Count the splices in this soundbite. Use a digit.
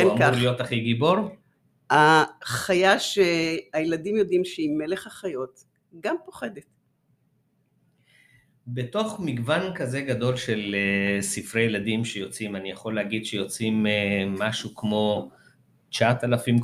0